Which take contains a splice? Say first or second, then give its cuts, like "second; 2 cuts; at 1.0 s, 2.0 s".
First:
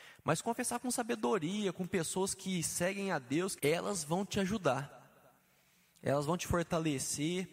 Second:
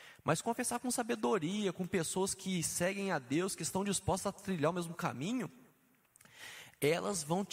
first; 1 cut; at 3.6 s